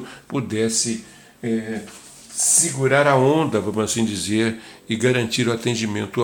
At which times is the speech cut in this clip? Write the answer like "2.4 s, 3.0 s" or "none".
none